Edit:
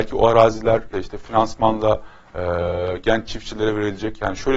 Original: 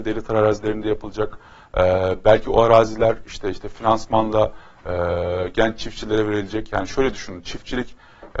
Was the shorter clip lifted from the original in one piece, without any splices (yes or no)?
no